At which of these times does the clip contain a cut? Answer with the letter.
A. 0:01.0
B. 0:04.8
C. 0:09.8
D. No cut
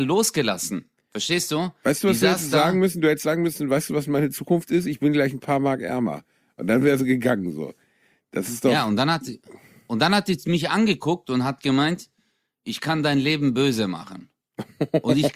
D